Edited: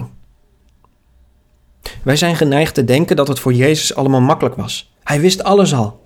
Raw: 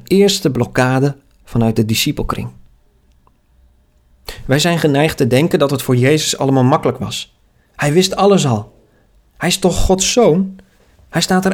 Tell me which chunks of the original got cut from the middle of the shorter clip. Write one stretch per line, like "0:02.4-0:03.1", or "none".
0:07.4-0:07.7